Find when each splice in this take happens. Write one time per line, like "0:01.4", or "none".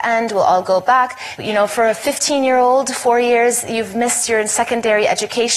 0:01.4